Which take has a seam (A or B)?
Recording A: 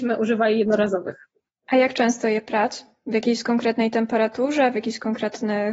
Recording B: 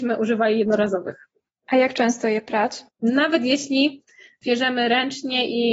B